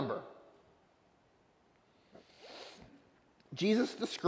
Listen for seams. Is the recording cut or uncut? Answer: uncut